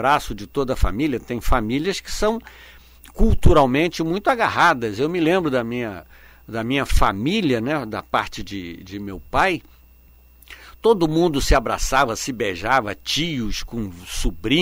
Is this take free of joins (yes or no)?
yes